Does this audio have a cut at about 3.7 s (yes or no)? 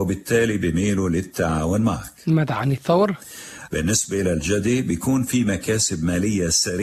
yes